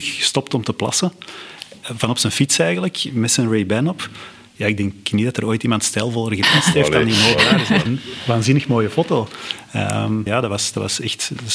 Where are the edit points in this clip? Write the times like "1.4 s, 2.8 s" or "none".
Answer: 7.9 s, 10.3 s

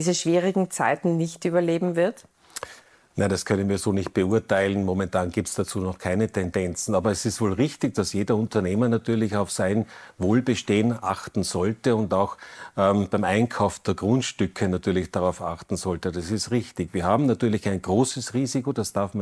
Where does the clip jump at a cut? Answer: none

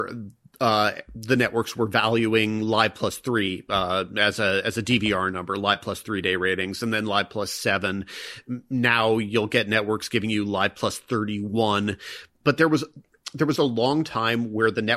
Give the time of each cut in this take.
12.4 s, 13.6 s

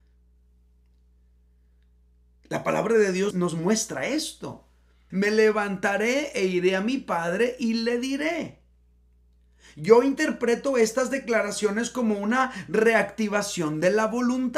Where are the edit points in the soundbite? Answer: 3.3 s, 5.1 s

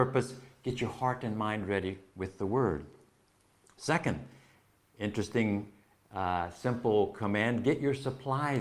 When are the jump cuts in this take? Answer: none

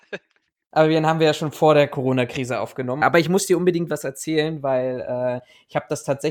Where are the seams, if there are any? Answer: 3.0 s

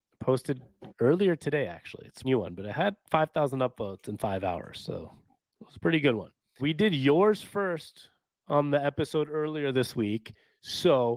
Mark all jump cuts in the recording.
2.2 s, 6.6 s

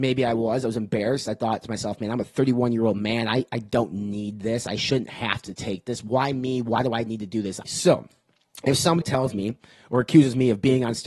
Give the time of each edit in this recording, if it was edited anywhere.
7.6 s, 9.0 s

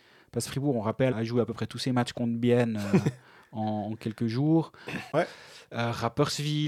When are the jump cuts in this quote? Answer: 1.1 s, 5.1 s

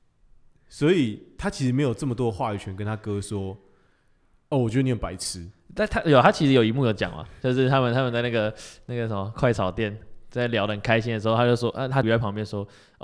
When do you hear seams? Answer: 12.0 s

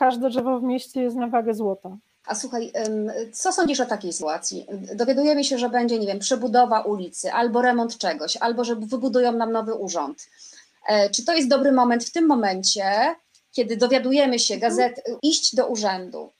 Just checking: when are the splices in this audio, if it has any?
2.2 s, 15.2 s

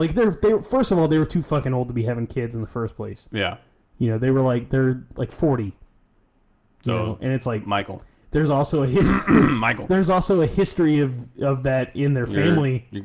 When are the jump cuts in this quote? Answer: none

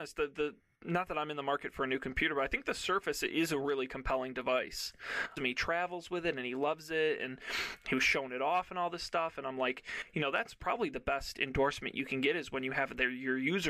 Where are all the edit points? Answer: 5.4 s

